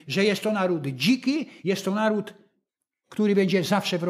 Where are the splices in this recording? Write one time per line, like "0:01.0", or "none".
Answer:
none